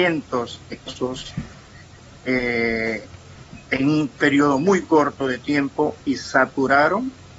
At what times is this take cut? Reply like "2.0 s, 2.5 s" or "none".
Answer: none